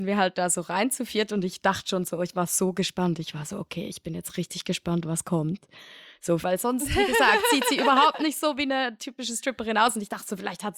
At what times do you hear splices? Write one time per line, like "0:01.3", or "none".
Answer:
0:06.4

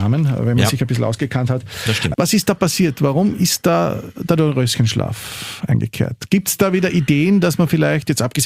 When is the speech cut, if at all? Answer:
0:02.1

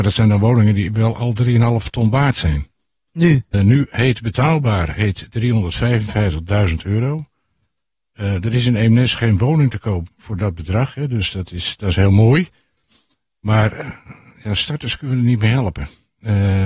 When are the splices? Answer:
0:03.5
0:10.1

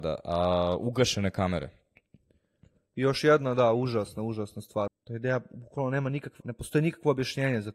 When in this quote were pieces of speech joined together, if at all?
0:04.9
0:06.4

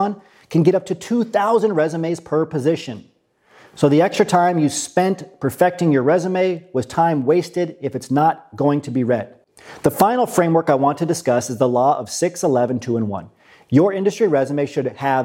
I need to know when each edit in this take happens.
none

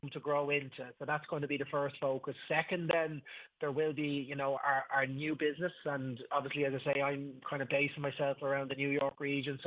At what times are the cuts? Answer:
0:04.6

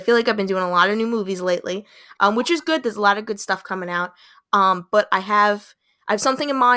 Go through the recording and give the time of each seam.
none

